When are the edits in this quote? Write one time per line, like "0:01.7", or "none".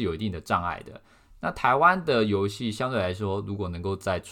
none